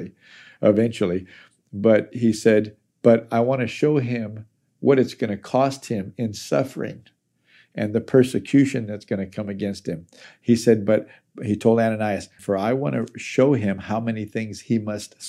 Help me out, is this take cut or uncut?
cut